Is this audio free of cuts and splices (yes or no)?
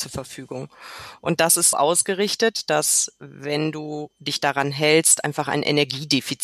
no